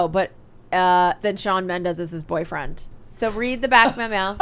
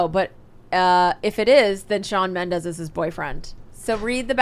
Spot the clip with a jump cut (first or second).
first